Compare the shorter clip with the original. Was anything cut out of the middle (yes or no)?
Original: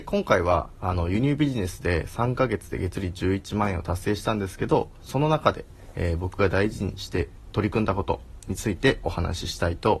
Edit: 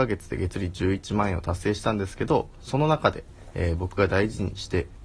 no